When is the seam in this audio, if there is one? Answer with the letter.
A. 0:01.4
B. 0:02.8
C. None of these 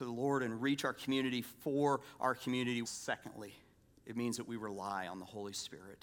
B